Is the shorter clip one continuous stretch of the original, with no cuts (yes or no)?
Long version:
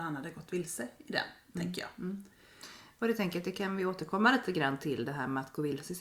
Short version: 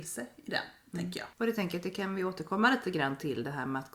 no